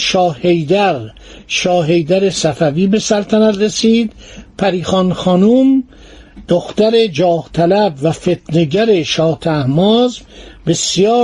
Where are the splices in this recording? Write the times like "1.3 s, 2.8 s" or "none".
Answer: 6.4 s